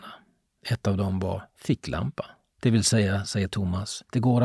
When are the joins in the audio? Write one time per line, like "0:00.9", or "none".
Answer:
none